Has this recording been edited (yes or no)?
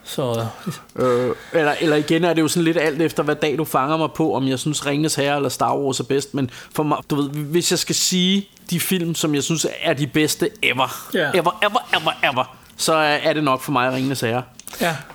yes